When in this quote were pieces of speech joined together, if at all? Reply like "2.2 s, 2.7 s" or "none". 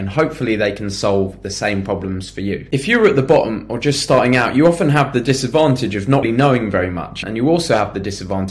6.2 s